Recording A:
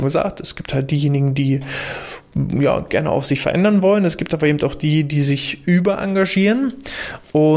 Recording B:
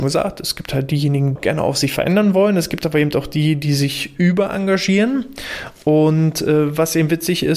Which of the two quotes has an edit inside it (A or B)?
B